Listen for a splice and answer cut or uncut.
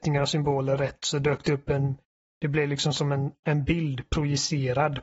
uncut